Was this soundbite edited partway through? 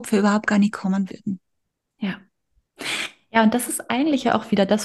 no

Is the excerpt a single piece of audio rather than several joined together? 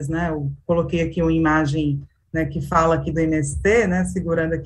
yes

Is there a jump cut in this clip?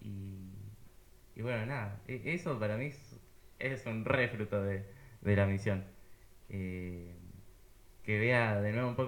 no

